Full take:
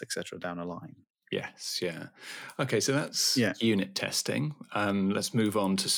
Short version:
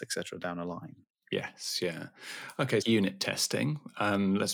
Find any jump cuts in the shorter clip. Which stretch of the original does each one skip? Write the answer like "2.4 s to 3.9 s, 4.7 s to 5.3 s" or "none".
2.8 s to 3.6 s